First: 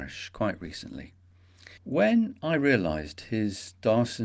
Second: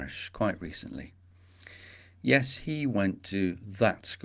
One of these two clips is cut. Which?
first; 1 cut; at 1.8 s

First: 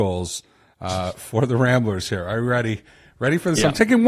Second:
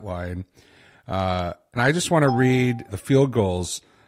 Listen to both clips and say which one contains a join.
second; 2 cuts; at 1.8 s, 2.9 s

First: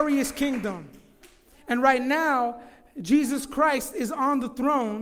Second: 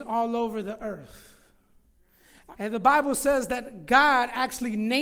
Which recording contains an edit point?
second; 1 cut; at 2.5 s

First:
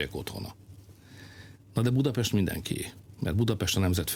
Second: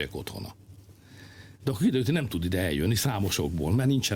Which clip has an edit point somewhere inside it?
second; 1 cut; at 1.6 s

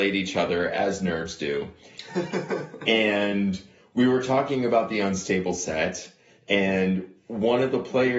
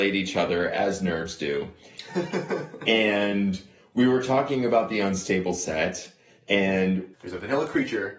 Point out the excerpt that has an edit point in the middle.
second; 1 cut; at 7.1 s

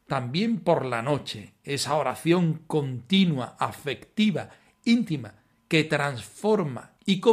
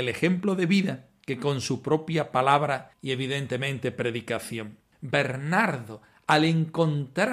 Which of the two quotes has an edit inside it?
second; 1 cut; at 4.9 s

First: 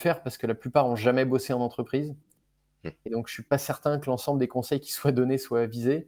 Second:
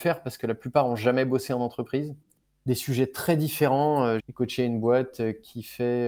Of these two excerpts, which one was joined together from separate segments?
second; 2 cuts; at 2.5 s, 4.2 s

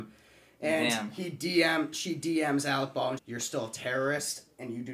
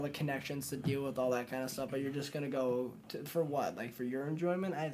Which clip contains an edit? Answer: first; 1 cut; at 3.2 s

